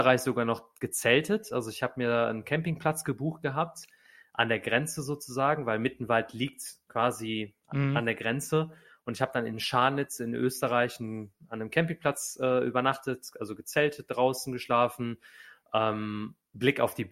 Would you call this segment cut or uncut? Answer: uncut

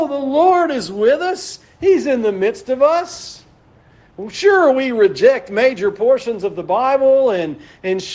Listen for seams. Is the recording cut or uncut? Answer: uncut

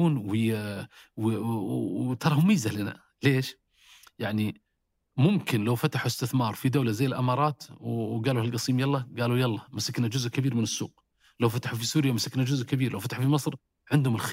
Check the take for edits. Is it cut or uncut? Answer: uncut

